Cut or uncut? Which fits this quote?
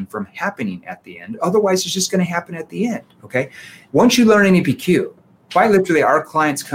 cut